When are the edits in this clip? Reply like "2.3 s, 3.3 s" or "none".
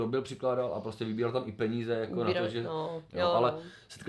3.1 s